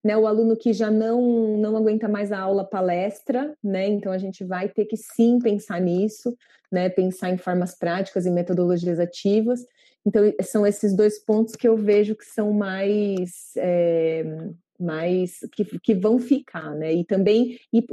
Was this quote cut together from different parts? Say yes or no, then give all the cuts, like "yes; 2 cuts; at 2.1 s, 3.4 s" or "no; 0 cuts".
no; 0 cuts